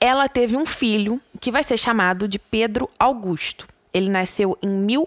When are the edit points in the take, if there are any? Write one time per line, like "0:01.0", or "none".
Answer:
none